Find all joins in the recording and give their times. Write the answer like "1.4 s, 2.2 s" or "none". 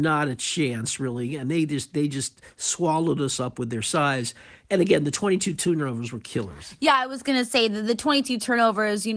none